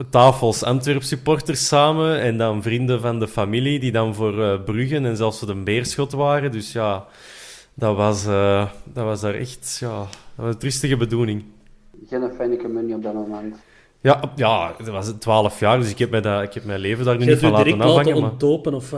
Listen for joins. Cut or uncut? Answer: uncut